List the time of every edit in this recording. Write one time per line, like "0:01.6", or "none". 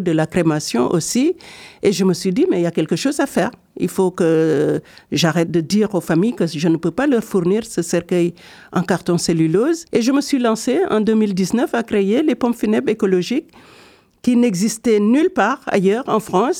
0:05.5
0:09.9

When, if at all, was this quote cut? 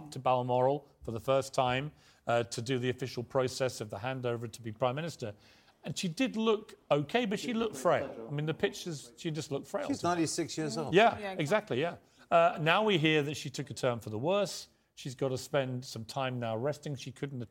none

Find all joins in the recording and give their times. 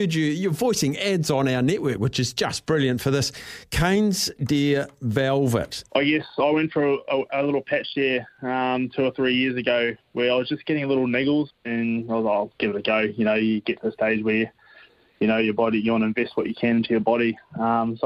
0:05.9
0:11.5

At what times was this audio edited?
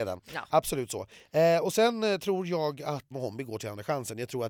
0:03.1

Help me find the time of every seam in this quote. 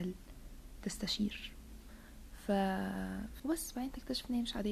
0:03.4

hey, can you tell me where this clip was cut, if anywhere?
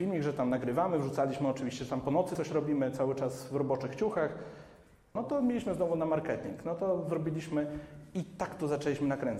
0:05.2

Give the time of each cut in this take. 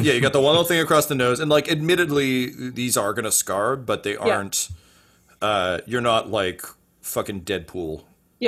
none

